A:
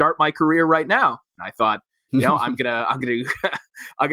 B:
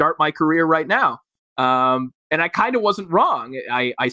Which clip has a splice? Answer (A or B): A